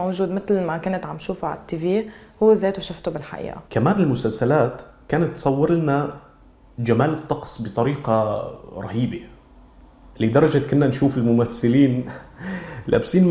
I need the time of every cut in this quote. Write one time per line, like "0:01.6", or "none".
0:03.7